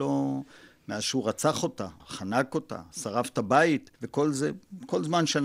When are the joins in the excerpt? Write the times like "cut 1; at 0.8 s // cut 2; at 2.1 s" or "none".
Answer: cut 1; at 2.0 s // cut 2; at 4.0 s